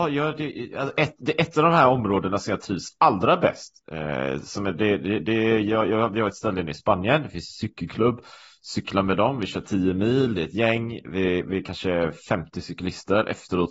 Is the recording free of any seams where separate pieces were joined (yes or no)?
yes